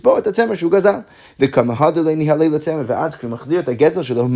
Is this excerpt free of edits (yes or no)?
yes